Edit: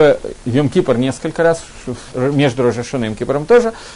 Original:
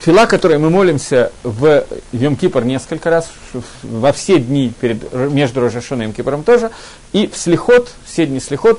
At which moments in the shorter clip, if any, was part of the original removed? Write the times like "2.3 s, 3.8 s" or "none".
2.1 s